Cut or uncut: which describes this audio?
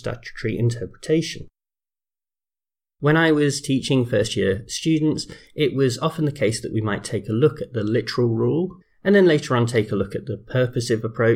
cut